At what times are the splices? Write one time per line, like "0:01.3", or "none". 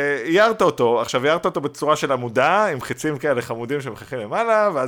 none